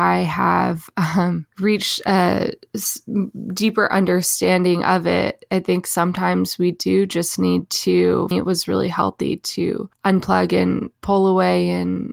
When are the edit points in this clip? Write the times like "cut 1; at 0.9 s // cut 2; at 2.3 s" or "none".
cut 1; at 8.3 s